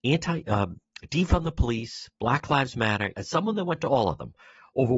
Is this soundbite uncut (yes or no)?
no